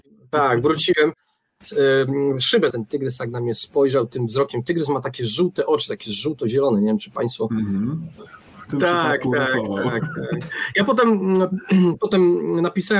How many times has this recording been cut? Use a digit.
2